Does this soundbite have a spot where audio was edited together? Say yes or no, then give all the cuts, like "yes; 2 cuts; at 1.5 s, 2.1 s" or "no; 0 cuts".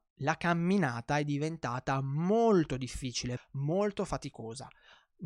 yes; 1 cut; at 3.4 s